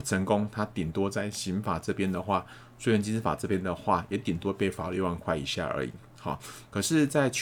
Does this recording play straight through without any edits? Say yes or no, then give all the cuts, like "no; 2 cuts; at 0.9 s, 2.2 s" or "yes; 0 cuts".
yes; 0 cuts